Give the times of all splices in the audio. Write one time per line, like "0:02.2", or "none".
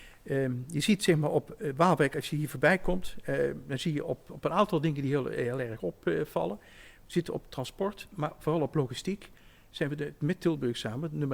none